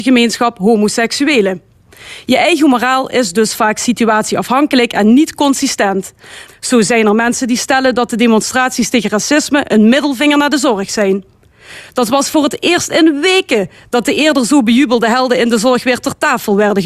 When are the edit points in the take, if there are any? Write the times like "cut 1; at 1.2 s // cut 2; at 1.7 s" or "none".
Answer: cut 1; at 6.5 s